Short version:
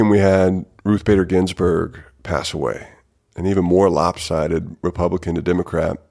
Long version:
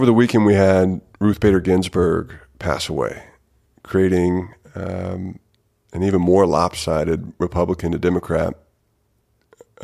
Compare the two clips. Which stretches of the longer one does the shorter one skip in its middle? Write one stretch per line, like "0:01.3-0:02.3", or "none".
0:03.5-0:05.7